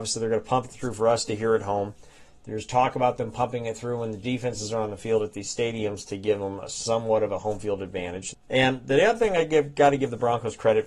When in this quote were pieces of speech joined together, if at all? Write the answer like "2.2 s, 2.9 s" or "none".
8.3 s